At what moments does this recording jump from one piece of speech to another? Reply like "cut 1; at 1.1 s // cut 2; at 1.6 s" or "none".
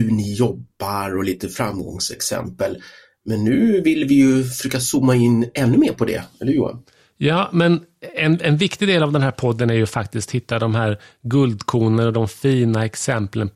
none